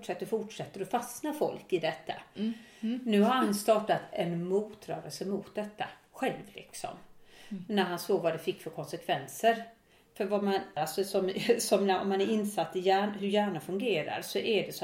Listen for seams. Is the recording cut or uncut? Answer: cut